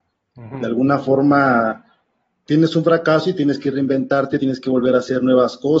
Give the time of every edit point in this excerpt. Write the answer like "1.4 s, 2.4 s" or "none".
2.5 s, 4.4 s